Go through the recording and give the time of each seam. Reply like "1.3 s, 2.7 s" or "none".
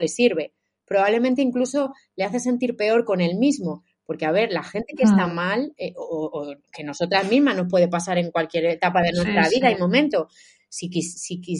none